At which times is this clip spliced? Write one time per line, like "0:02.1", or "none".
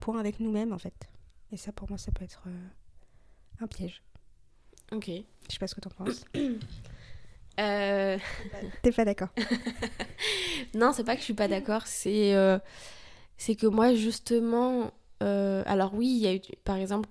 none